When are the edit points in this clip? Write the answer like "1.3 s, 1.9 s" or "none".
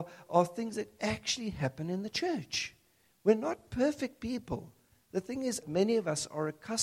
5.6 s